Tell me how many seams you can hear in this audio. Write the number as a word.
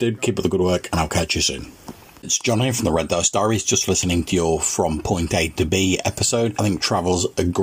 two